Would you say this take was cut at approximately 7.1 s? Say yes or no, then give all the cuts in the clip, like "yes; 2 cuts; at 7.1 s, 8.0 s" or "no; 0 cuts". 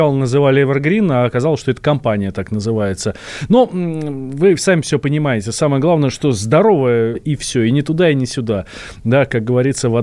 yes; 1 cut; at 7.1 s